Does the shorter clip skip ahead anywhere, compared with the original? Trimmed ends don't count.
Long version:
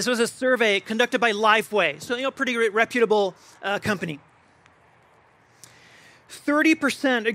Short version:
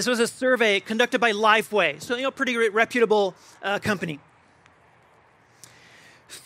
no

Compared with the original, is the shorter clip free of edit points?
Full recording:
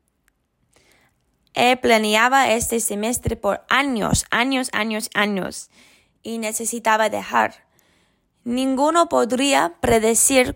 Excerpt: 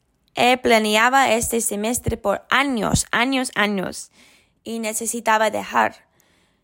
no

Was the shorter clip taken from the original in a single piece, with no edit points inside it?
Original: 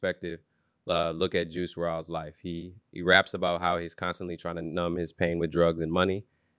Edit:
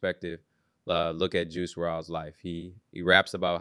yes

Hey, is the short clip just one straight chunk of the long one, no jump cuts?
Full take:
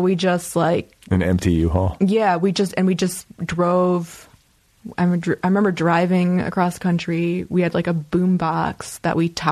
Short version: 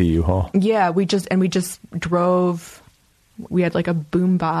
no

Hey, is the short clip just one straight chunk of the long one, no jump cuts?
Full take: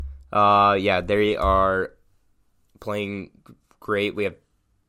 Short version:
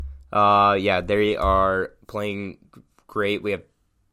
no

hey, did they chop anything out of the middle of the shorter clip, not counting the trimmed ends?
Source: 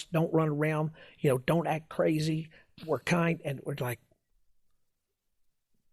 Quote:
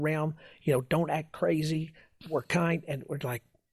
no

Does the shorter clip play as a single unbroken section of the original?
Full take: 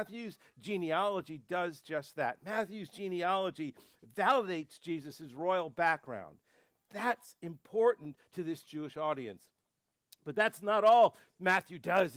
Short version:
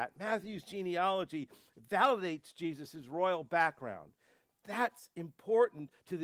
yes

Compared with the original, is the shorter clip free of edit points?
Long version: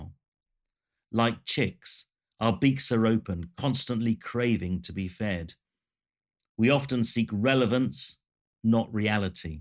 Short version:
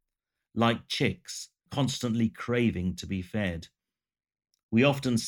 no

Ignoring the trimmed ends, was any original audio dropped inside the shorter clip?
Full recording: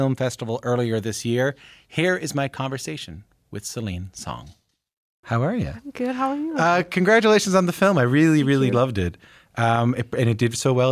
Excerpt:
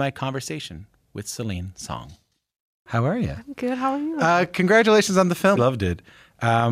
yes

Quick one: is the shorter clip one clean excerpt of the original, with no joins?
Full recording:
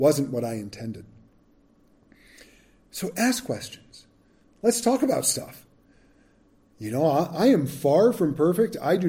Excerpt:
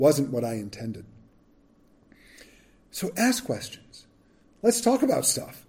yes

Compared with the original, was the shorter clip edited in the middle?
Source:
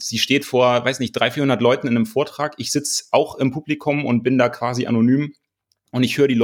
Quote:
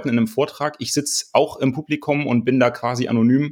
no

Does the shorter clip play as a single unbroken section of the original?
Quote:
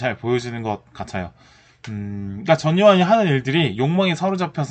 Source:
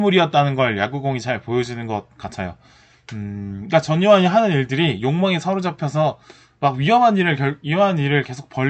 yes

